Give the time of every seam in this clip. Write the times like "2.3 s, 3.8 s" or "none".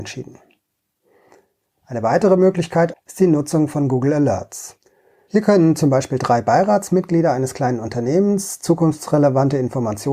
2.9 s, 5.3 s